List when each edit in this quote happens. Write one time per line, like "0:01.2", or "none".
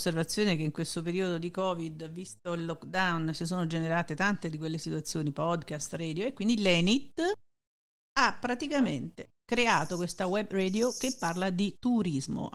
none